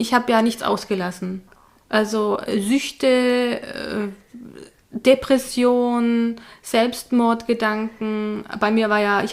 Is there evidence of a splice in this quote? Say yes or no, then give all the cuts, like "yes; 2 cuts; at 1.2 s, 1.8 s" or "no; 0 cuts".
no; 0 cuts